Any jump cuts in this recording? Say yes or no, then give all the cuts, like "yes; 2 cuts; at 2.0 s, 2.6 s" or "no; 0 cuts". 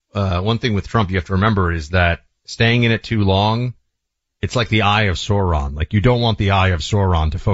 no; 0 cuts